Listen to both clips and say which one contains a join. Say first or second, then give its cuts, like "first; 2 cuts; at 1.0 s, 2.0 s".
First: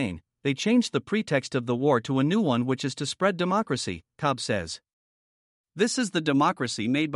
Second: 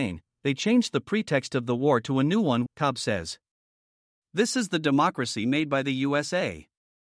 second; 1 cut; at 2.7 s